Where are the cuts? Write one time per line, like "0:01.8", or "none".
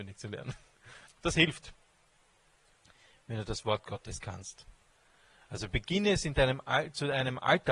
0:01.1